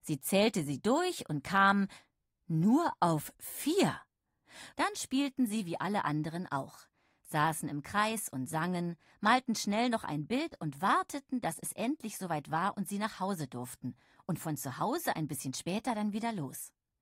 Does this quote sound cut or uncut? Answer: cut